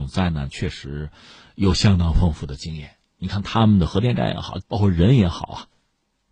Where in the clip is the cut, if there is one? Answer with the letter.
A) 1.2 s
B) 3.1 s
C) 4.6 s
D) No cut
C